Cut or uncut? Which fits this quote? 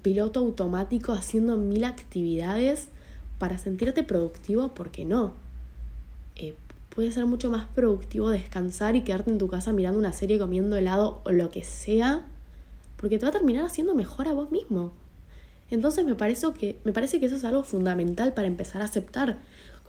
uncut